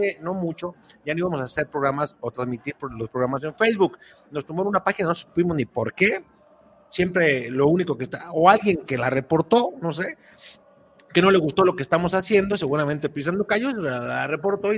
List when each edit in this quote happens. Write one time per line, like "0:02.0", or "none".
none